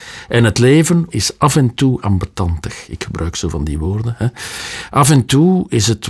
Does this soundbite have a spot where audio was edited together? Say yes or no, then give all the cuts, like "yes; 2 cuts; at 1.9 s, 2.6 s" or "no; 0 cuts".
yes; 1 cut; at 1.1 s